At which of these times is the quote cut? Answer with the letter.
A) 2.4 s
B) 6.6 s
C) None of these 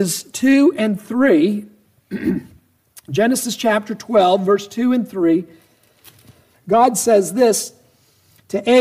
B